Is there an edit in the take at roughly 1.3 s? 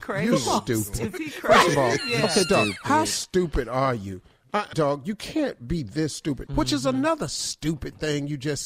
no; 2 cuts; at 4.7 s, 6.5 s

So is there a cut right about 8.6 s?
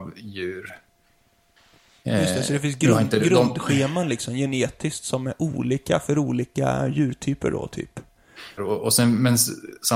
yes; 1 cut; at 8.6 s

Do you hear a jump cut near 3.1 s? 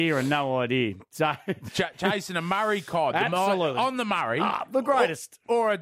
no; 0 cuts

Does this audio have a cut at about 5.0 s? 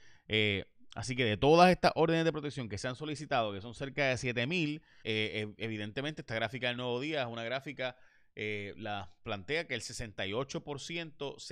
yes; 1 cut; at 5.0 s

